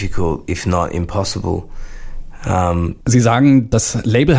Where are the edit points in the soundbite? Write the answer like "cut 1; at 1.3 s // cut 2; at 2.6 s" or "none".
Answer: cut 1; at 3.0 s